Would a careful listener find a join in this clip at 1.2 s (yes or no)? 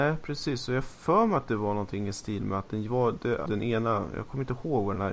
no